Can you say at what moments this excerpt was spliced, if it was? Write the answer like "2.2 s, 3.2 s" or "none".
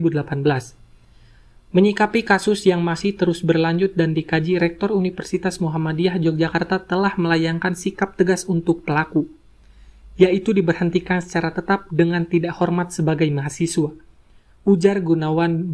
none